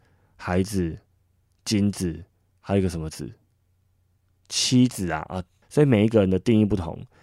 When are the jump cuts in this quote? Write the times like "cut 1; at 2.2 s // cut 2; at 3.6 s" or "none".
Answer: cut 1; at 5.6 s